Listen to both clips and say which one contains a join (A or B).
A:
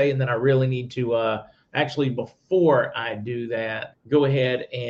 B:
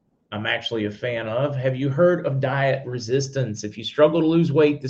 A